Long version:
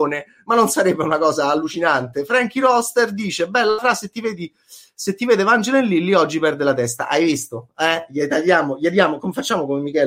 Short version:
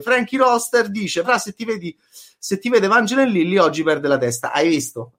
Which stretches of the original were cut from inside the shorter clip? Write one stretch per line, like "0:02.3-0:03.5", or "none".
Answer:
0:03.5-0:03.8